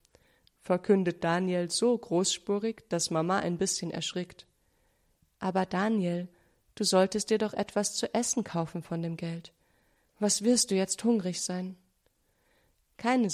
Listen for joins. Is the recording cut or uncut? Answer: uncut